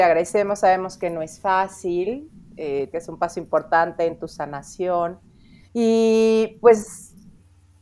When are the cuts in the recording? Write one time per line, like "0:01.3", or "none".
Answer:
0:02.9
0:05.7